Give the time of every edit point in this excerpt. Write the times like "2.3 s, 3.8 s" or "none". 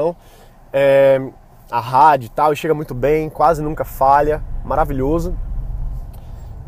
none